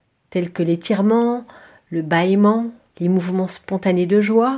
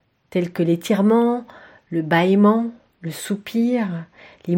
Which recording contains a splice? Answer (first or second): first